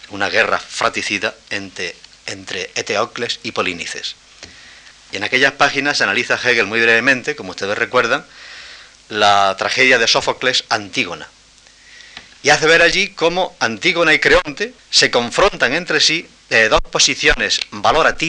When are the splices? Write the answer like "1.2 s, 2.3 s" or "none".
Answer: 4.9 s, 14.8 s